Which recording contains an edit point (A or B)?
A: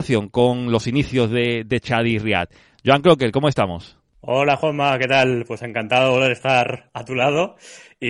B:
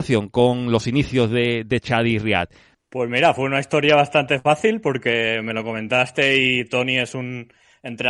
B